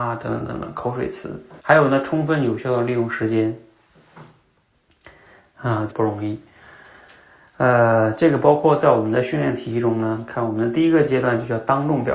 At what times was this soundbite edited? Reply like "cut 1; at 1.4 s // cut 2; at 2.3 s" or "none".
cut 1; at 1.6 s // cut 2; at 5.9 s